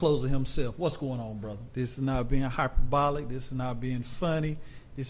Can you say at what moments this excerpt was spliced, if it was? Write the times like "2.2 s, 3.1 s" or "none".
1.7 s